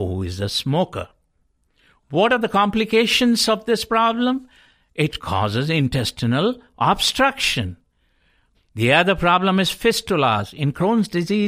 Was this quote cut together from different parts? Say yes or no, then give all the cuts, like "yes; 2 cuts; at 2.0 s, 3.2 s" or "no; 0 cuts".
yes; 1 cut; at 8.5 s